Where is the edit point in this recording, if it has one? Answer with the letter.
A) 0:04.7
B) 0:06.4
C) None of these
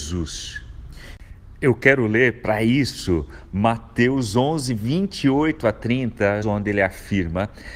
B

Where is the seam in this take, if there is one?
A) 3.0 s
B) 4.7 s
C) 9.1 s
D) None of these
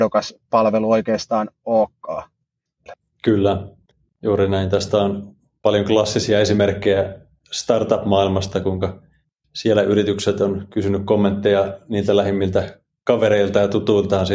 D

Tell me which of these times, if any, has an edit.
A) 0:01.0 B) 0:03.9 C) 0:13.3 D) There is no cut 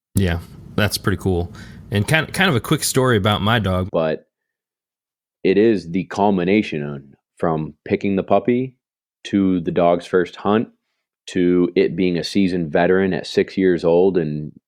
B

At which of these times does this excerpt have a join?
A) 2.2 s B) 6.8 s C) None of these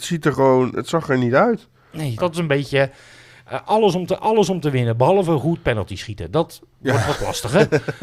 A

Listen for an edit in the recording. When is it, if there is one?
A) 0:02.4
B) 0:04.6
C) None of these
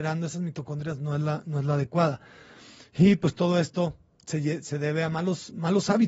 C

